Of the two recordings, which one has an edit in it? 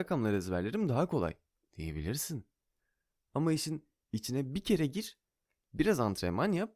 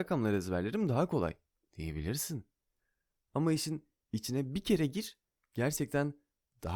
second; 1 cut; at 5.4 s

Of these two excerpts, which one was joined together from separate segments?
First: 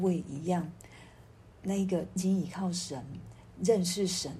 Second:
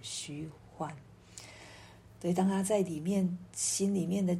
first; 1 cut; at 2.2 s

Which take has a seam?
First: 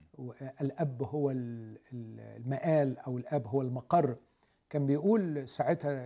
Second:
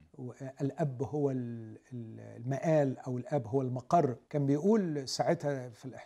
second; 1 cut; at 4.2 s

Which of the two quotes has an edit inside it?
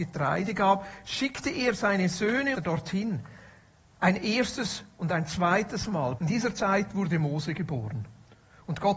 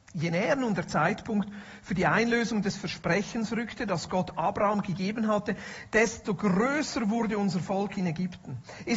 first; 2 cuts; at 2.5 s, 6.2 s

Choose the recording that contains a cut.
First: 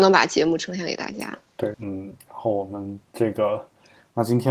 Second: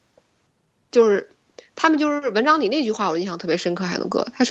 first; 1 cut; at 1.7 s

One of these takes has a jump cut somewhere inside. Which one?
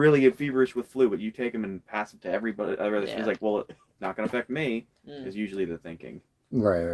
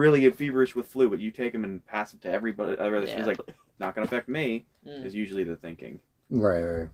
second; 1 cut; at 3.4 s

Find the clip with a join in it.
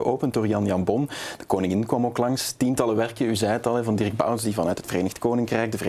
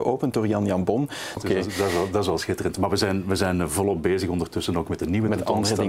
second; 1 cut; at 1.4 s

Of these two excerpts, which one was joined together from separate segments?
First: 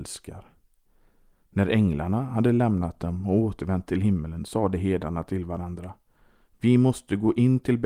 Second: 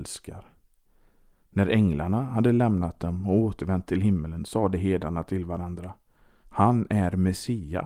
second; 1 cut; at 6.4 s

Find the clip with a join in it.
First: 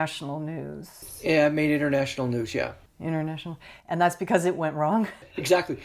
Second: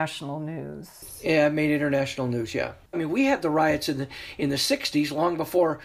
second; 1 cut; at 2.9 s

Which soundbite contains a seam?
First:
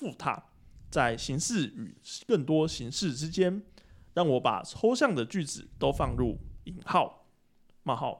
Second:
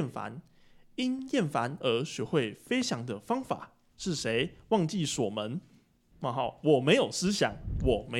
second; 2 cuts; at 3.9 s, 6.1 s

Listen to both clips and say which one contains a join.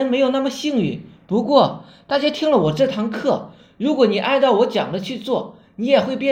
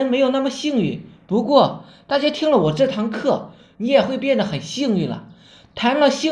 second; 1 cut; at 3.7 s

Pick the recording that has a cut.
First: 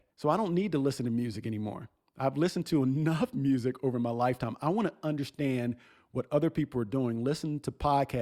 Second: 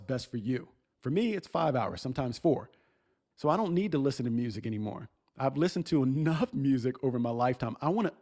second; 1 cut; at 3.3 s

